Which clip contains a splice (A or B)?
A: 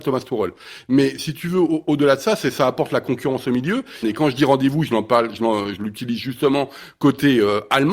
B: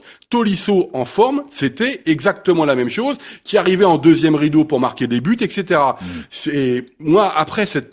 A